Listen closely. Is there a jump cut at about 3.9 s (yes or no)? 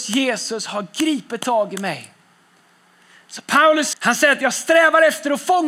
yes